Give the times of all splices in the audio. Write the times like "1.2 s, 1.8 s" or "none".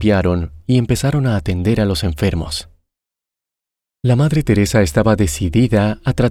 none